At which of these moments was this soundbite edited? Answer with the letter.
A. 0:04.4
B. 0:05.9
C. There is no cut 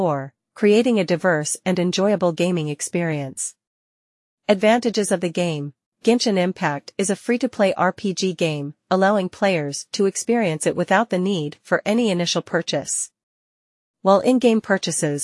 B